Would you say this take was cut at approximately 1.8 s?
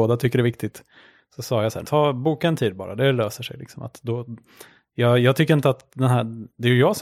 yes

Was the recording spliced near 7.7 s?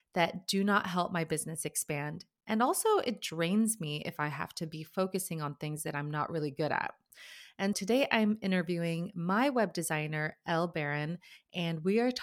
yes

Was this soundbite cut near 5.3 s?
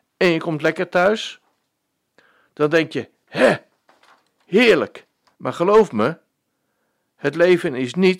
yes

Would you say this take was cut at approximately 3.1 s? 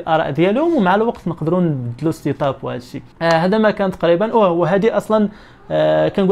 yes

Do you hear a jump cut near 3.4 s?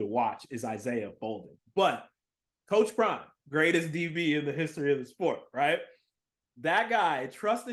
yes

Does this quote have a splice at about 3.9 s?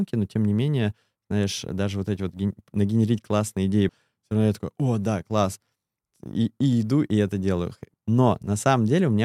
yes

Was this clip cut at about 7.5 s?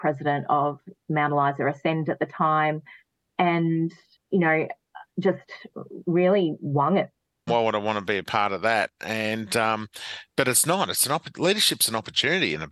yes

